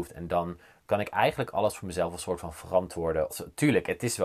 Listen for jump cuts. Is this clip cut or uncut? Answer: cut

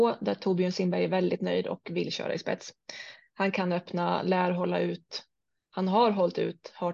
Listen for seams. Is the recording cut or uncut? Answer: uncut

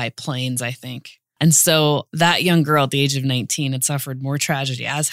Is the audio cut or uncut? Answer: cut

